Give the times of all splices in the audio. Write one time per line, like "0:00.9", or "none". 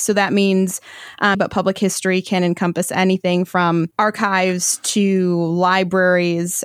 0:01.3
0:03.9